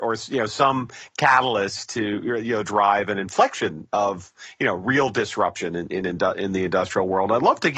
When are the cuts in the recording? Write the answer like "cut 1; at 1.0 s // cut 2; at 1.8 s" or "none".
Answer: cut 1; at 2.6 s